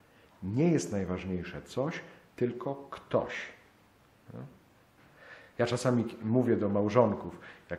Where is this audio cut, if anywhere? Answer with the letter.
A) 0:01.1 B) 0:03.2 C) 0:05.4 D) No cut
D